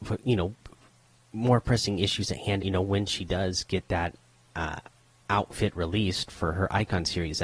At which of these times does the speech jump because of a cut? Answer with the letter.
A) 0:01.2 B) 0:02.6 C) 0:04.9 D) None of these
B